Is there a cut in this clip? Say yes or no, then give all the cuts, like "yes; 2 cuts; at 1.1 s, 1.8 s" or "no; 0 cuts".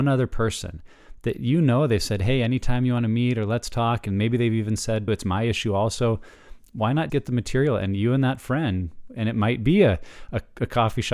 yes; 2 cuts; at 5.1 s, 7.1 s